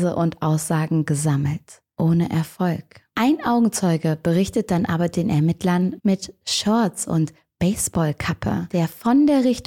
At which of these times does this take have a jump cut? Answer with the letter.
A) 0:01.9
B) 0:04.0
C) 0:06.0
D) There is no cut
C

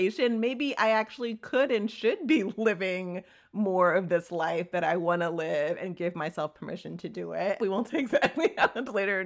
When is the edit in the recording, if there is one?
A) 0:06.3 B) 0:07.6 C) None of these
B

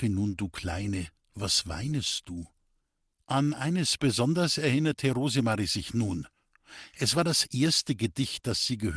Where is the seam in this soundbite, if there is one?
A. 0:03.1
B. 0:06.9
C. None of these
A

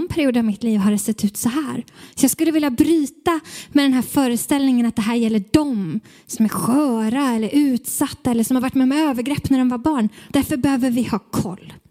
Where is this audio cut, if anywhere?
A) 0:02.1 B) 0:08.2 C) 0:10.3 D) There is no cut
C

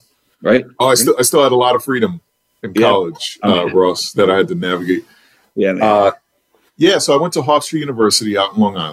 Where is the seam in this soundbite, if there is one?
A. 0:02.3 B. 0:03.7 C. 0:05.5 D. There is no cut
D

